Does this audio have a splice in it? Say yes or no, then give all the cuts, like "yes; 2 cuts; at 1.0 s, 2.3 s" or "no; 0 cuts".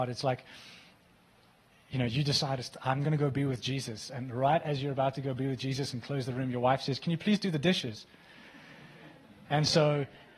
yes; 1 cut; at 9.4 s